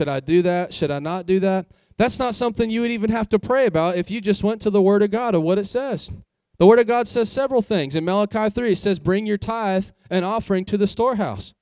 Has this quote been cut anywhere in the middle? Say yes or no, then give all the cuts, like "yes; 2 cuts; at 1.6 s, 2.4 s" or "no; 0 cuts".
no; 0 cuts